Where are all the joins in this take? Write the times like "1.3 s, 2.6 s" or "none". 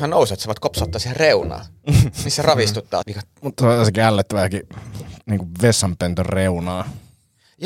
3.0 s, 5.2 s